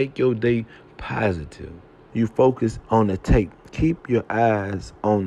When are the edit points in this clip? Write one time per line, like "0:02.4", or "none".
0:02.1